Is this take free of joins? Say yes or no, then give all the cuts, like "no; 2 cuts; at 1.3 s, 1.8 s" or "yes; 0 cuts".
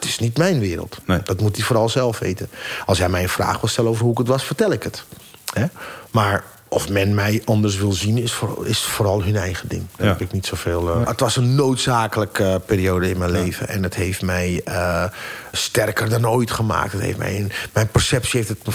no; 2 cuts; at 11.0 s, 15.5 s